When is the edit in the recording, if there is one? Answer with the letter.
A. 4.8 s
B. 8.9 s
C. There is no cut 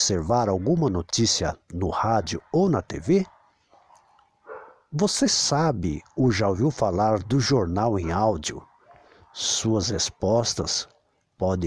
C